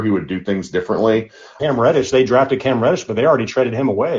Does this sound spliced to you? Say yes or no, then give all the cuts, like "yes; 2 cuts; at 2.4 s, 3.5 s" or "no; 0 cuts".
yes; 1 cut; at 1.6 s